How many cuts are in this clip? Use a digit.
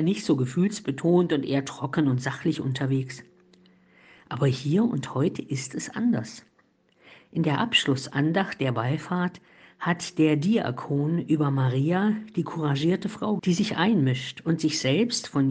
1